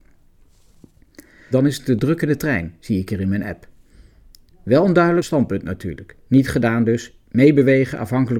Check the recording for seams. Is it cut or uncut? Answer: cut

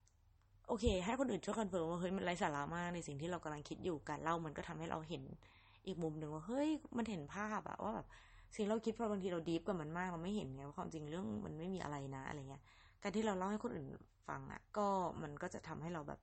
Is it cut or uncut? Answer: cut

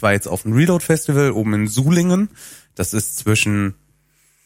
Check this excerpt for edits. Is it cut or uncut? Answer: uncut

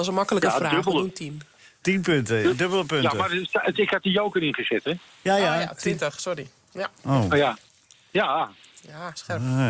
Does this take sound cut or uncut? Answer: uncut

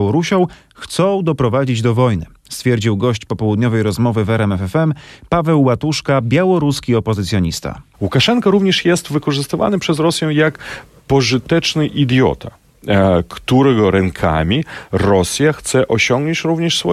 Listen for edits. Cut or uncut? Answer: cut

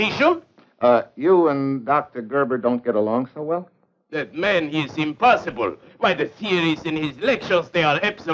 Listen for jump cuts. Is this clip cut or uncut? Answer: uncut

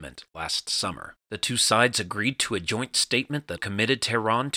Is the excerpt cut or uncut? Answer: cut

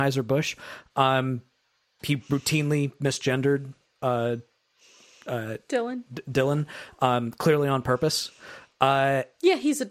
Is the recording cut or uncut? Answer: uncut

